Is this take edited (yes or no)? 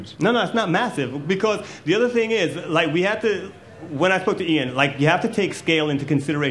no